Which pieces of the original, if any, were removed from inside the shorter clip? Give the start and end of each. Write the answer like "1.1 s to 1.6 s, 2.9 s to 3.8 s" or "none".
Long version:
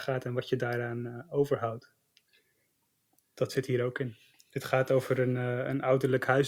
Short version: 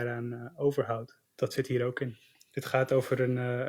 2.0 s to 3.2 s

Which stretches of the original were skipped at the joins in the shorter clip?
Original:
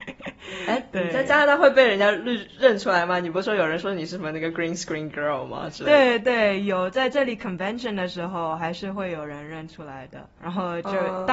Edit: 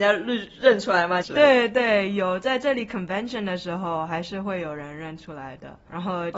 3.2 s to 5.7 s

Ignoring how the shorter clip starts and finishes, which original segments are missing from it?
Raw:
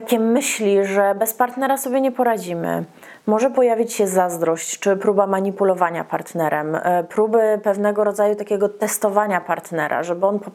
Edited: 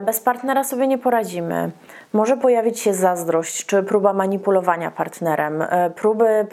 none

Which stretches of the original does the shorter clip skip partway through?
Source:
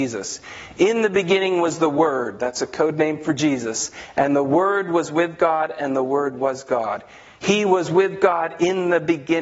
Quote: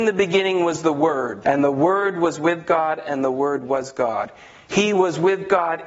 2.4 s to 4.1 s

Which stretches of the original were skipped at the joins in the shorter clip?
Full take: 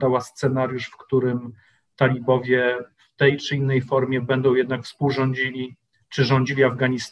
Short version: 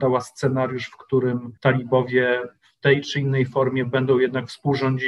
1.6 s to 1.9 s

